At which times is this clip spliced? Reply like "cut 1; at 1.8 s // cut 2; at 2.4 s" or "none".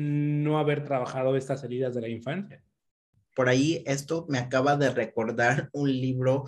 cut 1; at 3.3 s